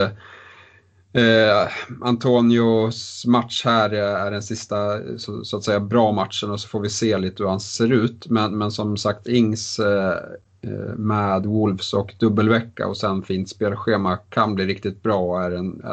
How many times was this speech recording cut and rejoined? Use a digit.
0